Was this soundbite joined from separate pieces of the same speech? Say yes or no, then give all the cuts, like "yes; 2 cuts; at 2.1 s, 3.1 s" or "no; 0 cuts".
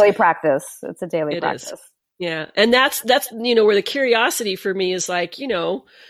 no; 0 cuts